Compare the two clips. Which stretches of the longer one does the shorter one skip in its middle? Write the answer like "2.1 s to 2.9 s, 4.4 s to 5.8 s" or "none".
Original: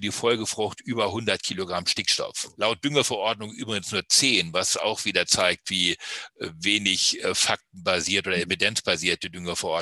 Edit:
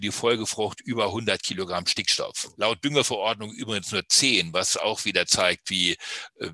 none